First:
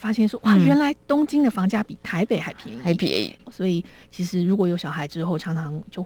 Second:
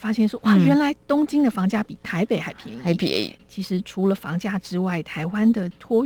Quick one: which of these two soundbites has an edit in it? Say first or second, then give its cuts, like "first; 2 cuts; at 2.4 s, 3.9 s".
first; 1 cut; at 3.4 s